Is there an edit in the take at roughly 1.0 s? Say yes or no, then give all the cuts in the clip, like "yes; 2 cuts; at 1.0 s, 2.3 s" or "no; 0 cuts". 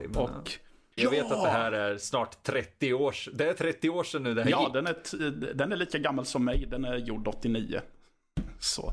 yes; 1 cut; at 1.0 s